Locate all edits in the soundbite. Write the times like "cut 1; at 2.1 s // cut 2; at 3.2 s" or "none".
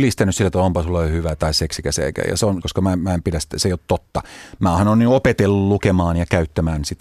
cut 1; at 2.6 s

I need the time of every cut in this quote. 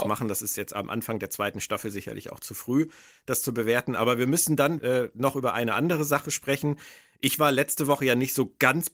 cut 1; at 4.8 s

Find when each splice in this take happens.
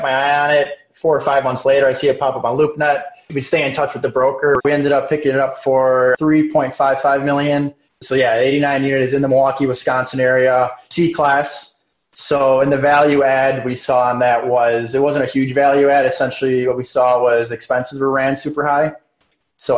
cut 1; at 4.6 s

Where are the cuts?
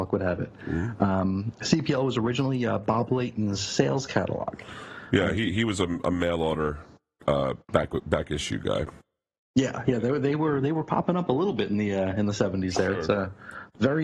cut 1; at 7.6 s

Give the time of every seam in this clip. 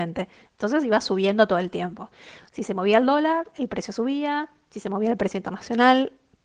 none

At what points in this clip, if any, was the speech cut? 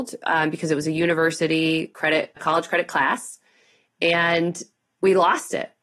cut 1; at 2.4 s

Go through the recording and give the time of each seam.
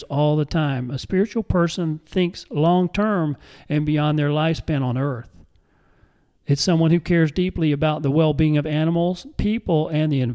none

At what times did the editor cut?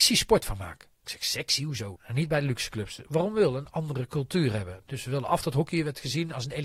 cut 1; at 2.0 s

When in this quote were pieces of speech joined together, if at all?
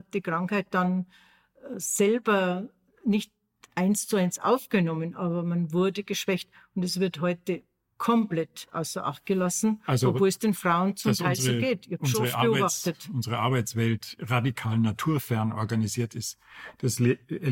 cut 1; at 14.2 s

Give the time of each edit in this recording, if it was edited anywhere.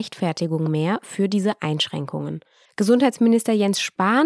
cut 1; at 2.7 s

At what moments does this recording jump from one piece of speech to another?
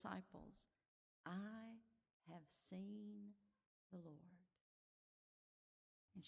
none

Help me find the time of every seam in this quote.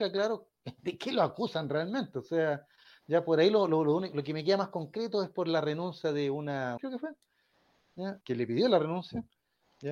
cut 1; at 6.8 s // cut 2; at 8.2 s

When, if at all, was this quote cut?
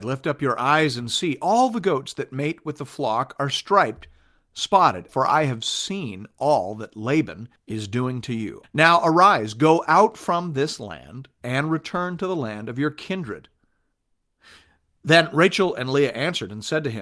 cut 1; at 5.1 s // cut 2; at 7.6 s // cut 3; at 8.6 s

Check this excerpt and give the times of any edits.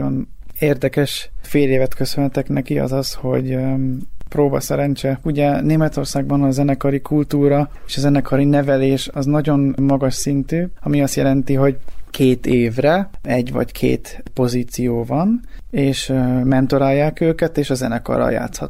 cut 1; at 5.2 s // cut 2; at 10.8 s // cut 3; at 15.6 s

